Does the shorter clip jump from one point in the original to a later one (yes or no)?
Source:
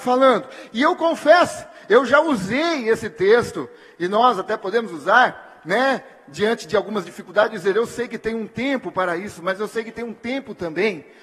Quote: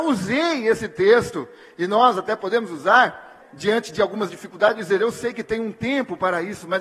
yes